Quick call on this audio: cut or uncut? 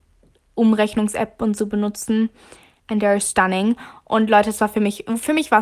cut